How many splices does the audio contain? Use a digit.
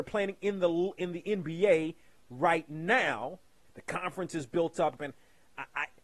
2